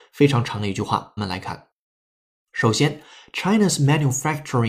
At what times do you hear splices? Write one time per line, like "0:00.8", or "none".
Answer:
0:01.2